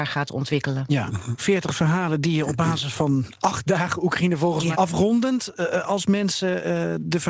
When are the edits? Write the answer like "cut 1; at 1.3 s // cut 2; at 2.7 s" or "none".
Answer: cut 1; at 1.4 s // cut 2; at 4.7 s